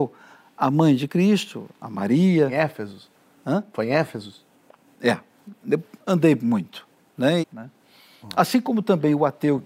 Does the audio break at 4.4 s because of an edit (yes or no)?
no